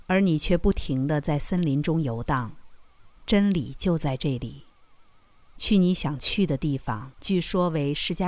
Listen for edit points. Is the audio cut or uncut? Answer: cut